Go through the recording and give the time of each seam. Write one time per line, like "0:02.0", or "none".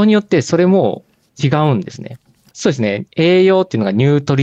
0:02.5